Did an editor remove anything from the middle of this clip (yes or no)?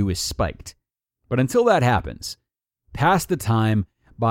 yes